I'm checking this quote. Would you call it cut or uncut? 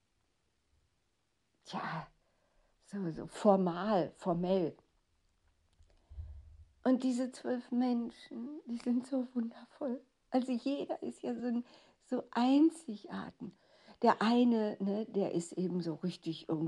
uncut